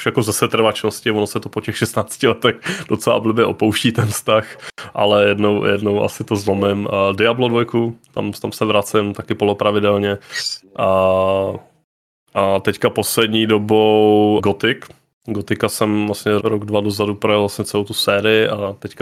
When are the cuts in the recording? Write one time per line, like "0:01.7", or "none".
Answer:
0:14.4
0:16.4